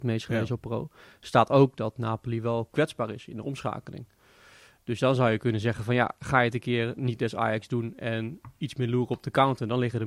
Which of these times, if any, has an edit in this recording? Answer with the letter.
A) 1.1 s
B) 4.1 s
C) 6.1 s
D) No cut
D